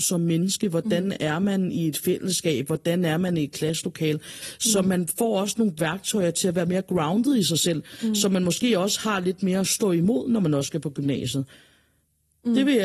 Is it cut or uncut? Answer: uncut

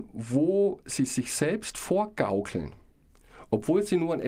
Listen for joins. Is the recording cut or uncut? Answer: uncut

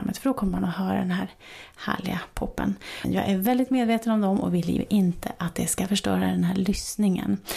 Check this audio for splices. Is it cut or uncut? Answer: cut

